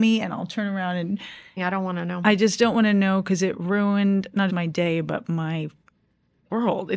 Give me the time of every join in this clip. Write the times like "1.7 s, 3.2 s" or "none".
1.6 s, 4.5 s